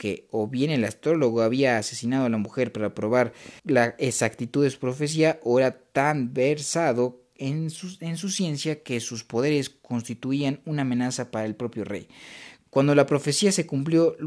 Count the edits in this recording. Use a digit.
2